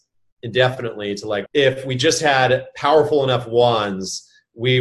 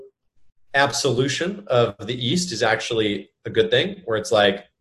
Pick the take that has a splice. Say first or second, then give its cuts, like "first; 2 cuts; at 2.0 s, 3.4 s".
first; 1 cut; at 1.5 s